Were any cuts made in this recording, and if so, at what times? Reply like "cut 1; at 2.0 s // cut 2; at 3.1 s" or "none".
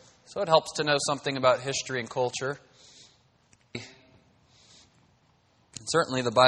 cut 1; at 3.7 s